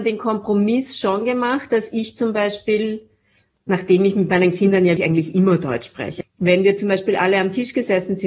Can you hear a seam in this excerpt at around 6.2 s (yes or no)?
yes